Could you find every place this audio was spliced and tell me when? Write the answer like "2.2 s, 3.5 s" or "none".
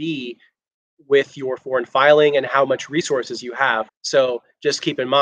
3.9 s